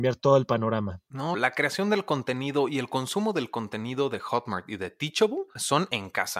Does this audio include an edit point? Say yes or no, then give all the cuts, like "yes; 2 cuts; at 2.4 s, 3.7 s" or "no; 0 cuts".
yes; 1 cut; at 1.3 s